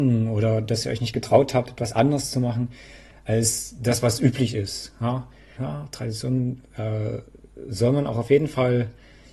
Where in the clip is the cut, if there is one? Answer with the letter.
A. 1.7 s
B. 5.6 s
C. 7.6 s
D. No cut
B